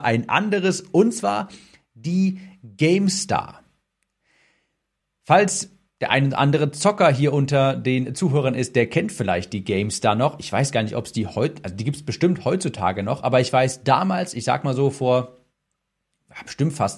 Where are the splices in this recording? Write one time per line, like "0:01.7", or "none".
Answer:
none